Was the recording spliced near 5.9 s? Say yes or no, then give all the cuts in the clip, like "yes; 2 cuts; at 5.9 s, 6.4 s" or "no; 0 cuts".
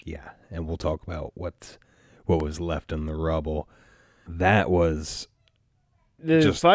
no; 1 cut; at 4.3 s